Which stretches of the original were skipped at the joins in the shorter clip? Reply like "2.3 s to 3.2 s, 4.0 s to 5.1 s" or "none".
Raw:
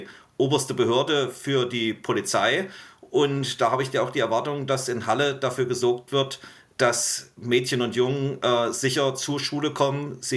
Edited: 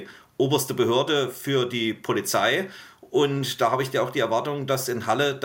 none